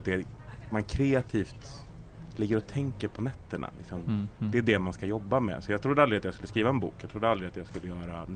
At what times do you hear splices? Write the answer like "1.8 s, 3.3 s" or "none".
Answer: 3.1 s